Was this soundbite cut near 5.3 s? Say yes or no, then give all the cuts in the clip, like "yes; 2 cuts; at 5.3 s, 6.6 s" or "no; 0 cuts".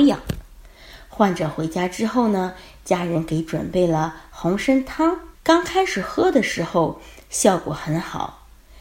yes; 1 cut; at 5.3 s